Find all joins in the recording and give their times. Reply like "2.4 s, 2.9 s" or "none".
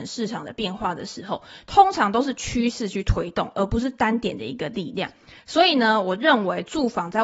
none